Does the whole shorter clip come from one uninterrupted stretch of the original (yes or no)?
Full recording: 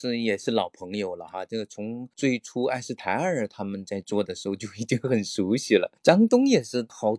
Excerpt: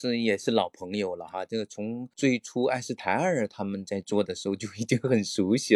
yes